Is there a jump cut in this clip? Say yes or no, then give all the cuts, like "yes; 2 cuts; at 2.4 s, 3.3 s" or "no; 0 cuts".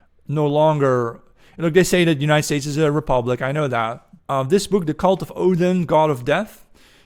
yes; 1 cut; at 4.2 s